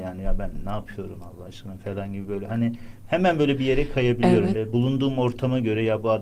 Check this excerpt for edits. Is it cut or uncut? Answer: cut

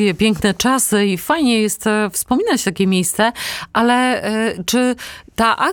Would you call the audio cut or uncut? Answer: uncut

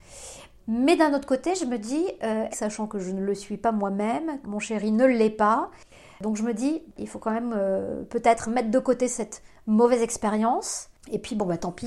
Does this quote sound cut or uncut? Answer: cut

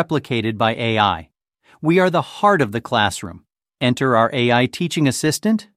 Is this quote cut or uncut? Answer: cut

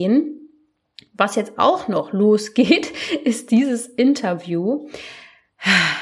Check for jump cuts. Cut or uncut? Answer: uncut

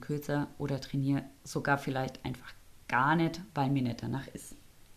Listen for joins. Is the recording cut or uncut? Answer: uncut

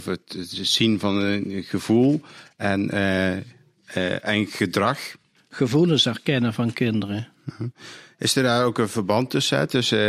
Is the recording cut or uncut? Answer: cut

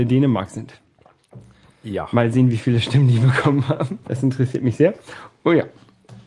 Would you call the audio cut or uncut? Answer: cut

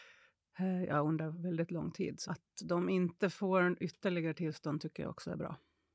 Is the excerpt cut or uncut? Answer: cut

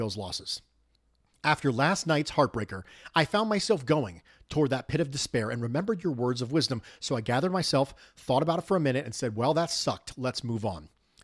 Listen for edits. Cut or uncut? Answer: uncut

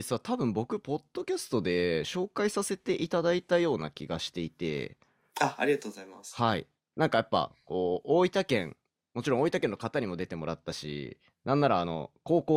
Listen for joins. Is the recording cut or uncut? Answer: uncut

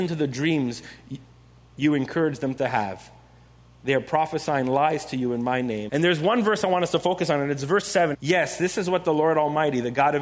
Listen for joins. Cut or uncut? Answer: cut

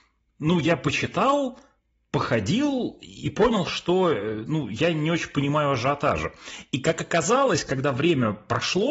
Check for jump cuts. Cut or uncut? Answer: uncut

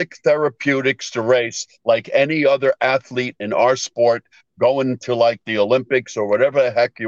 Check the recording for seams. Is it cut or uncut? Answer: uncut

